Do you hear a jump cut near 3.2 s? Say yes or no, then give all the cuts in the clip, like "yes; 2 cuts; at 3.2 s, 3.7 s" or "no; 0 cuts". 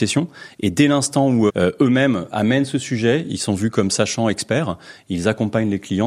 no; 1 cut; at 1.5 s